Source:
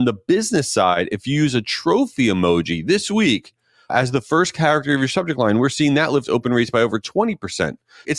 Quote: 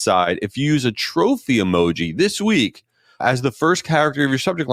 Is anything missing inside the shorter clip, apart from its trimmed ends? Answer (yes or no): no